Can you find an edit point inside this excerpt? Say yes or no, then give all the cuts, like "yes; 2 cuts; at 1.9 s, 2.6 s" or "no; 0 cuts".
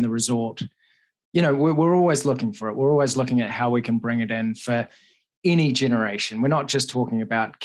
no; 0 cuts